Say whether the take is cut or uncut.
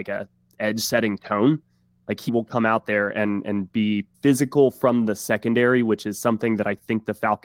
cut